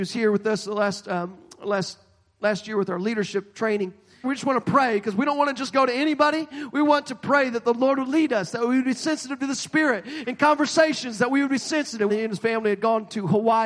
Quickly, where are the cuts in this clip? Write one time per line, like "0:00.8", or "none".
0:04.2
0:12.1